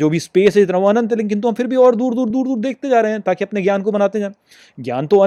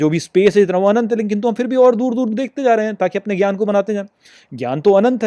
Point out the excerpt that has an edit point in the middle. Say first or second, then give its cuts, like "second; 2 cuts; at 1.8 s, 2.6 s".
second; 1 cut; at 2.3 s